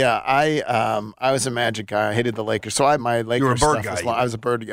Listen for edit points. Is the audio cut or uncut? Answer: cut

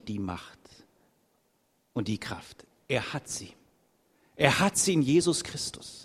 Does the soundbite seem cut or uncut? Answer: uncut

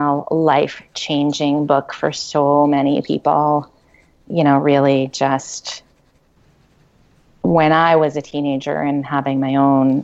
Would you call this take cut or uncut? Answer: uncut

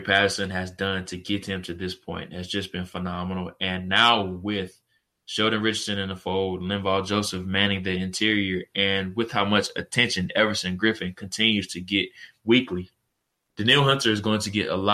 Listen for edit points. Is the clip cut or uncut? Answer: uncut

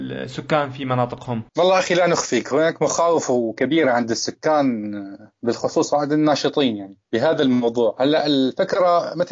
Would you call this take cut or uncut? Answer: cut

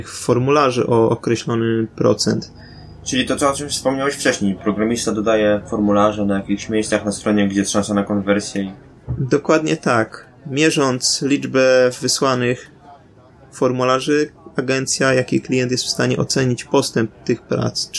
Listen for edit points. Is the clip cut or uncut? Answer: uncut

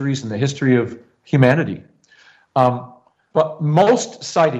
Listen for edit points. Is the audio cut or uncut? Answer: uncut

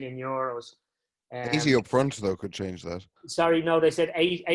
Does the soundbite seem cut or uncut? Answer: cut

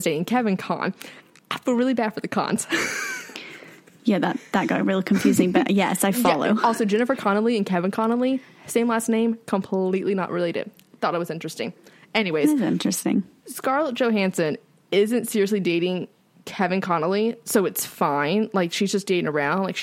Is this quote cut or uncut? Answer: uncut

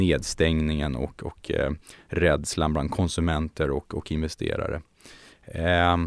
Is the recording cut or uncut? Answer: uncut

